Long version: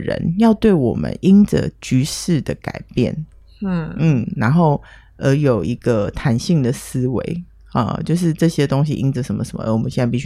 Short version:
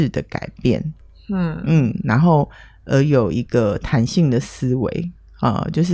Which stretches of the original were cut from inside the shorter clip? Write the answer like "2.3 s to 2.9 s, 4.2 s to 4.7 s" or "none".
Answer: none